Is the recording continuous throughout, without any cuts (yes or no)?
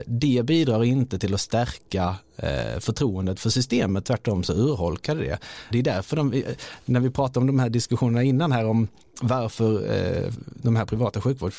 no